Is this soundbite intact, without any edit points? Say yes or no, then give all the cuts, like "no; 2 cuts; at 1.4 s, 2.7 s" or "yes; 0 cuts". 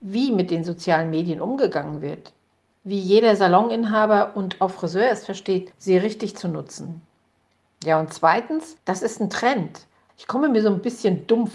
no; 1 cut; at 10.1 s